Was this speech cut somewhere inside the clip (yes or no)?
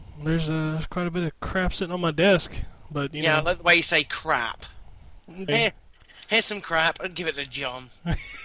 yes